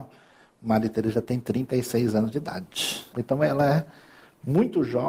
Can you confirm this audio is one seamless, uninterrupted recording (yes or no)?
no